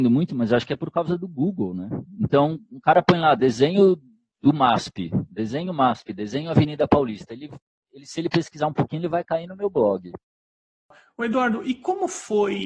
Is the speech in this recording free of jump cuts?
yes; 0 cuts

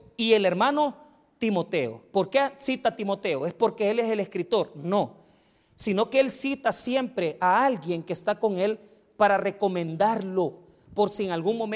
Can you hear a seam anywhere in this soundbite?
no; 0 cuts

